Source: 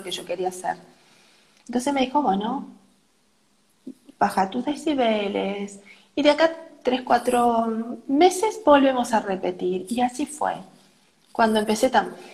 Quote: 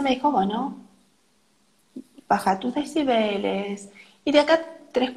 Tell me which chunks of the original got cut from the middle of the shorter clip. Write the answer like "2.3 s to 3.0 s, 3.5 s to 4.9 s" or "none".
none